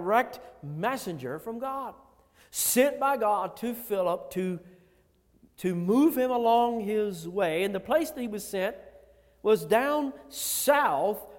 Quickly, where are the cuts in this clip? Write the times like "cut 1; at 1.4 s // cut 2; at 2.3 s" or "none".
none